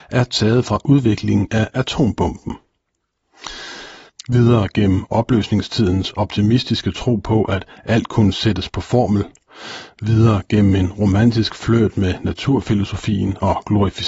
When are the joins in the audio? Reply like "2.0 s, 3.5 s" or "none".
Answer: 4.1 s